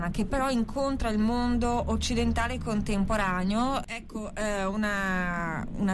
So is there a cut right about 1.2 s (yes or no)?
no